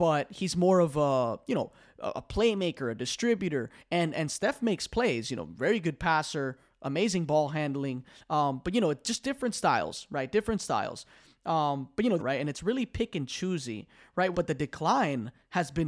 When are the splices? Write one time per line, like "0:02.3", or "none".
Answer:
0:12.2
0:14.3